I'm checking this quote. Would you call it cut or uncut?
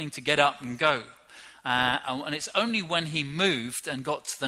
uncut